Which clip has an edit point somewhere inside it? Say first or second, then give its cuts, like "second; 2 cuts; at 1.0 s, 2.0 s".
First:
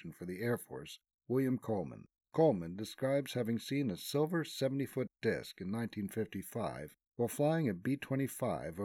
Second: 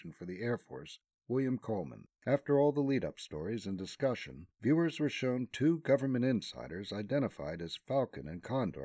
second; 2 cuts; at 2.2 s, 4.5 s